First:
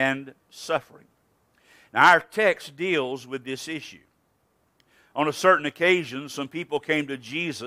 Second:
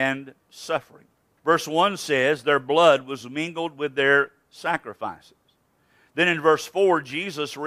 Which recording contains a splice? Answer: second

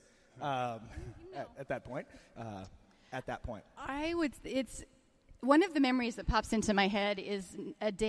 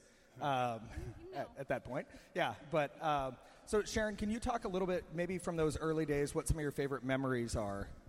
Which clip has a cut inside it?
first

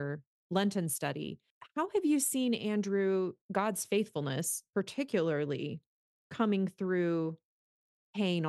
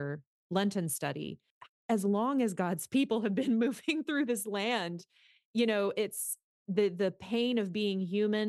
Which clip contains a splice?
second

